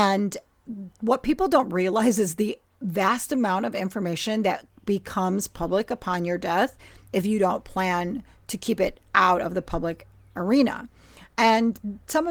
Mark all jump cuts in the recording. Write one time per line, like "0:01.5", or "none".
none